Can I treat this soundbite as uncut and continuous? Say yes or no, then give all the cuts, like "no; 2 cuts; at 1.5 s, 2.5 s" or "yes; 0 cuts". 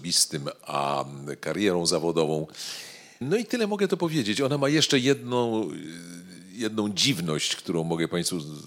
no; 1 cut; at 3.2 s